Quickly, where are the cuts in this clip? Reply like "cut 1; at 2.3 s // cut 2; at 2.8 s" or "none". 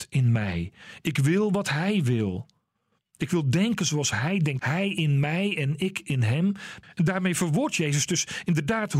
cut 1; at 4.6 s // cut 2; at 6.8 s